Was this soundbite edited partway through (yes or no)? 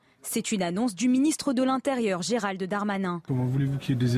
yes